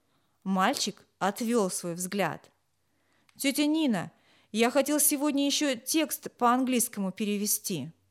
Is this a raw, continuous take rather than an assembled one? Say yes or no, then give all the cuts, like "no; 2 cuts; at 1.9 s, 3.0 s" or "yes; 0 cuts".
yes; 0 cuts